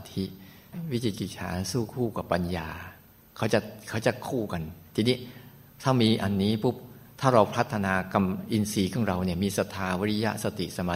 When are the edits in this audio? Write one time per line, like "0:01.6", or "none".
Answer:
none